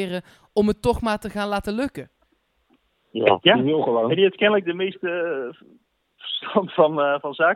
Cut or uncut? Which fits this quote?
uncut